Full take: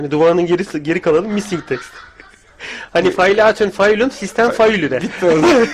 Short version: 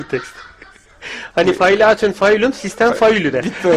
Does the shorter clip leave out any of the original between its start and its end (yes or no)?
no